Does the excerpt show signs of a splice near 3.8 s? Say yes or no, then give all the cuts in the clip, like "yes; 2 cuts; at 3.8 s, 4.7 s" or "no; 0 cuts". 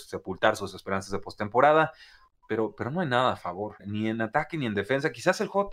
yes; 1 cut; at 3.8 s